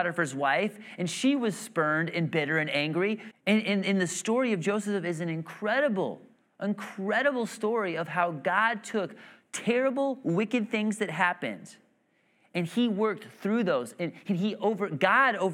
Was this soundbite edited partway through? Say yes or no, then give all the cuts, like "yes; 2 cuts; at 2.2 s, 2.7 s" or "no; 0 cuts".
yes; 1 cut; at 3.3 s